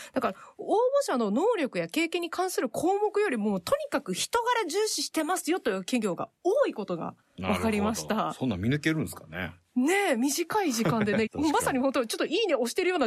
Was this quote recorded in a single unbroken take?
no; 1 cut; at 11.3 s

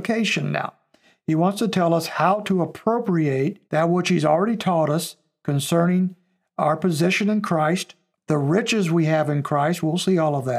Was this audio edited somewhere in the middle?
yes; 2 cuts; at 3.6 s, 8.1 s

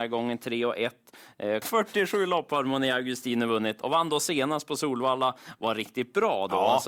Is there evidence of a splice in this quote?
yes; 1 cut; at 1.6 s

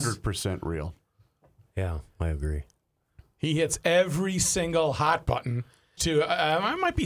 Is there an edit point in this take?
yes; 1 cut; at 6.0 s

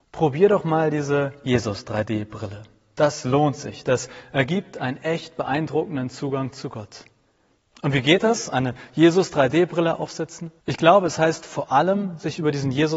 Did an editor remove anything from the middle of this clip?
yes; 1 cut; at 10.6 s

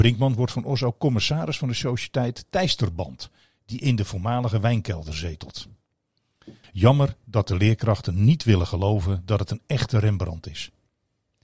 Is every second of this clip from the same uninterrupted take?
no; 1 cut; at 6.6 s

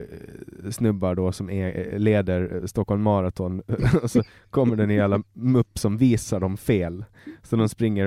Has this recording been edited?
no; 0 cuts

